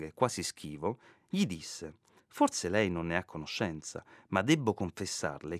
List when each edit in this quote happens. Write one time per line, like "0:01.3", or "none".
0:02.2